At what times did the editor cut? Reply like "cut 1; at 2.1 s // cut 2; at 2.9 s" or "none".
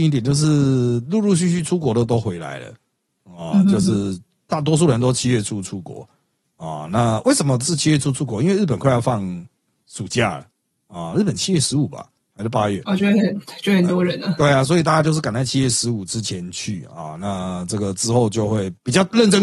none